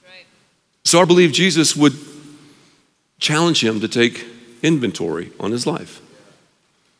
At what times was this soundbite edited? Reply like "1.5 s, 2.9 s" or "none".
1.0 s